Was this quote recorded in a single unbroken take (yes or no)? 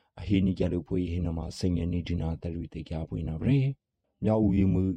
yes